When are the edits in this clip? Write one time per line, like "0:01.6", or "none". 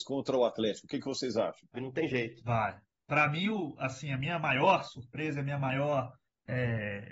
0:01.7